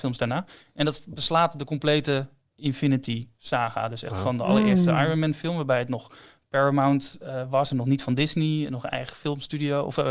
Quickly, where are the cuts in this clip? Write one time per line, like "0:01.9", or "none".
none